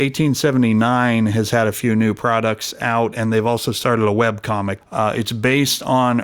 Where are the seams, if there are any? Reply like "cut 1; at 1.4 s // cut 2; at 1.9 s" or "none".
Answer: cut 1; at 4.8 s